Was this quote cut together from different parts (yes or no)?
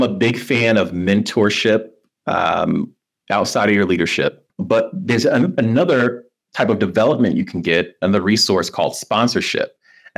yes